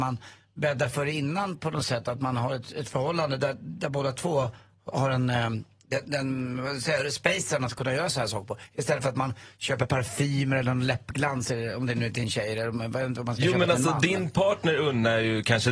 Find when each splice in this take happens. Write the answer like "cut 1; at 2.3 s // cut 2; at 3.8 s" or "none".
none